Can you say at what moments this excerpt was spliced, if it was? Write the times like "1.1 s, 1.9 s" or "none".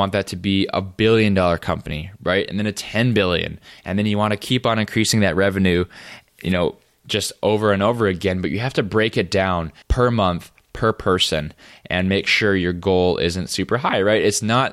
9.8 s